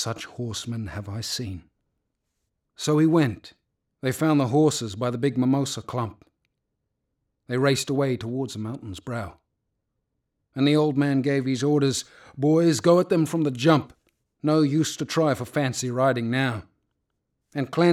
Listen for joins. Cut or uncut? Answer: uncut